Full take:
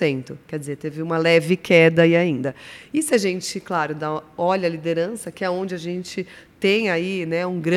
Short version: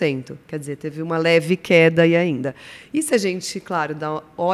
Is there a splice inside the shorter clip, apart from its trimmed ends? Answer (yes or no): no